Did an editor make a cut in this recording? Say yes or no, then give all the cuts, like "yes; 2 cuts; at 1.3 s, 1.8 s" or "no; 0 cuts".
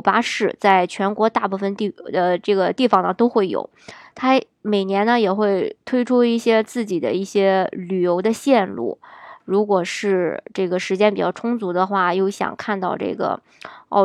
no; 0 cuts